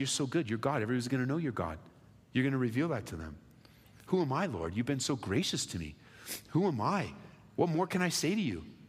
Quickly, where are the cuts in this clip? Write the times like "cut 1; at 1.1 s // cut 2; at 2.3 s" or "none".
none